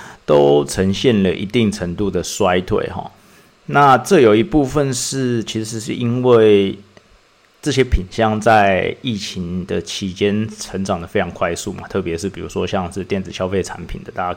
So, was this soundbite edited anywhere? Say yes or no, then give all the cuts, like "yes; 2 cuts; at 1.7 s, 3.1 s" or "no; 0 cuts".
no; 0 cuts